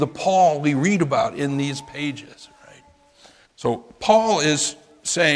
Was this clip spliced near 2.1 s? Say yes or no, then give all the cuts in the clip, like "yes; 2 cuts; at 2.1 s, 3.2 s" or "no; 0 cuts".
no; 1 cut; at 3.4 s